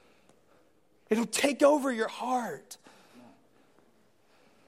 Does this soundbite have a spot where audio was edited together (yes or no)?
no